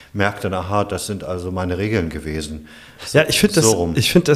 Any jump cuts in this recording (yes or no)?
no